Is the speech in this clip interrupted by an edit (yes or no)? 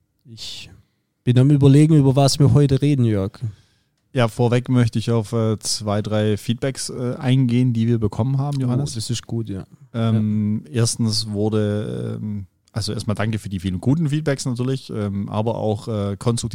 no